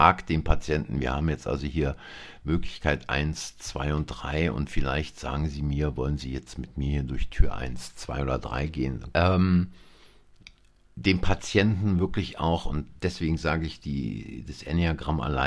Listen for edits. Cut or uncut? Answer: cut